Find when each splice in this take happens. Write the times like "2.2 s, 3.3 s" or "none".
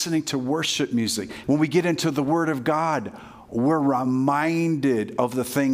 1.4 s